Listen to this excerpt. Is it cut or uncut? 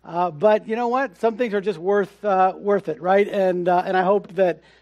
uncut